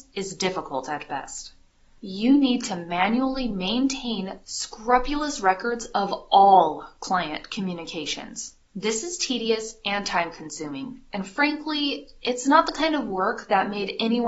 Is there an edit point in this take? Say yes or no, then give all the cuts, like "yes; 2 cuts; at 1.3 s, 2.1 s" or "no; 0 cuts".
yes; 1 cut; at 8.7 s